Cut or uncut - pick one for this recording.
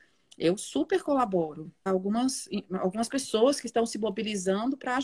cut